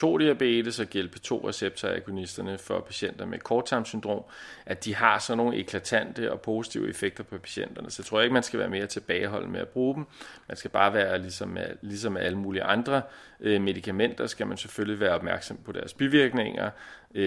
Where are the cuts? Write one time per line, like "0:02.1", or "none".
none

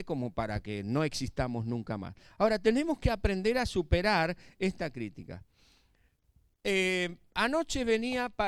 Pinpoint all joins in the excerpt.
none

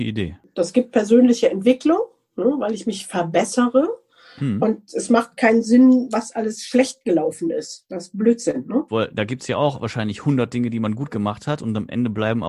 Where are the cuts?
0:06.1
0:08.9

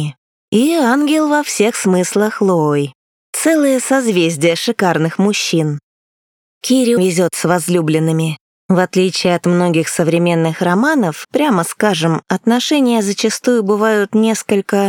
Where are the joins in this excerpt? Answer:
0:07.0
0:11.2

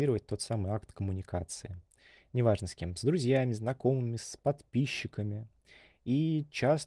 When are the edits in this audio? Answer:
none

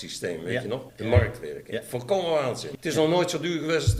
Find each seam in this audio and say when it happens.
none

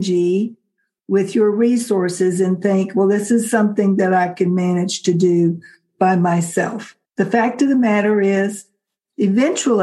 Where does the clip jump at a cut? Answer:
0:07.0

